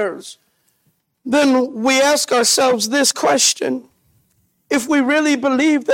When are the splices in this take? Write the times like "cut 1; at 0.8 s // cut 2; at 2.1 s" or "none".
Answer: cut 1; at 1.1 s